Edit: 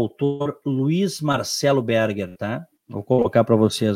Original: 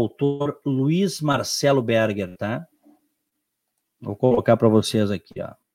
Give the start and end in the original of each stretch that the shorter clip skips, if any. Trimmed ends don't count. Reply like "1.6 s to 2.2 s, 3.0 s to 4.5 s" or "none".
2.8 s to 3.9 s